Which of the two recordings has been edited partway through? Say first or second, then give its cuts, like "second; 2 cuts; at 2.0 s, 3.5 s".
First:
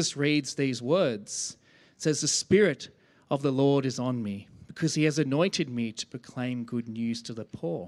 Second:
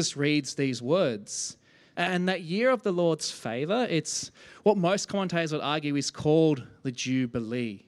second; 1 cut; at 1.9 s